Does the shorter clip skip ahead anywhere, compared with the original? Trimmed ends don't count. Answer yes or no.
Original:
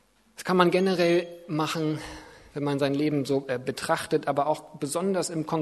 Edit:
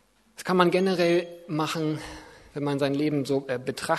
no